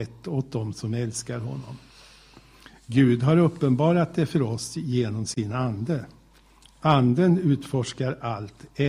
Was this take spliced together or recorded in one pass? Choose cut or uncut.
uncut